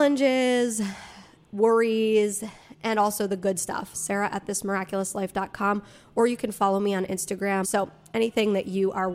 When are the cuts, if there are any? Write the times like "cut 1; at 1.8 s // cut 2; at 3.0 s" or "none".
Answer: cut 1; at 3.9 s // cut 2; at 7.6 s